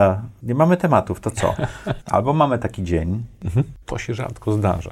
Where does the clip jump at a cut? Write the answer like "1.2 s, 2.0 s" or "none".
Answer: 2.0 s, 3.8 s